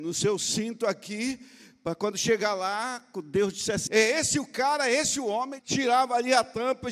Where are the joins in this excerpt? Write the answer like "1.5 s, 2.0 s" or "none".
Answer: 3.9 s, 5.6 s